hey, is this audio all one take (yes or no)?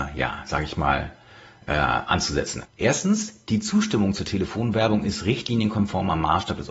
no